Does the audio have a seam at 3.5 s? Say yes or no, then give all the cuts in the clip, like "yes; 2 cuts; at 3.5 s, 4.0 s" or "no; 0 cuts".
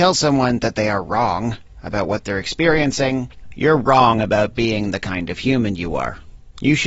yes; 1 cut; at 3.5 s